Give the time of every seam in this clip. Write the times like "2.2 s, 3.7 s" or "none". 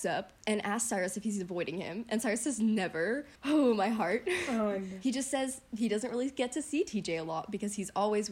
3.4 s